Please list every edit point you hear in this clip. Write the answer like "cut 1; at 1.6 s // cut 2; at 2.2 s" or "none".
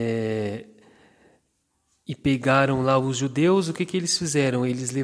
none